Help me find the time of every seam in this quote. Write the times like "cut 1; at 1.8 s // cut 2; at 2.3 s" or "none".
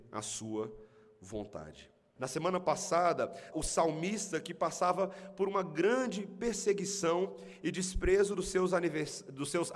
cut 1; at 2.2 s // cut 2; at 3.5 s